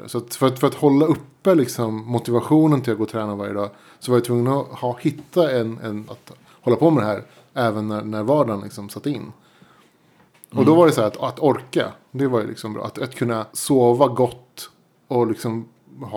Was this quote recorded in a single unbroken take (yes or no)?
no